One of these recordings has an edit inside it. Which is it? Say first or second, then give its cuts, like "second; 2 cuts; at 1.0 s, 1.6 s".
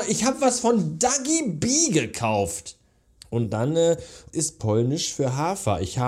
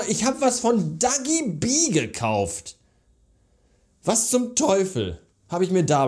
first; 2 cuts; at 3.2 s, 4.3 s